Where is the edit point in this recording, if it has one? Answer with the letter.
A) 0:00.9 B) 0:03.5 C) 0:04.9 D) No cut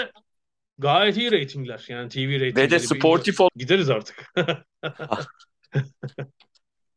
B